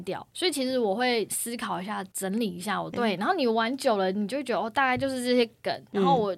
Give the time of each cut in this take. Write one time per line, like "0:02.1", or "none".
0:02.9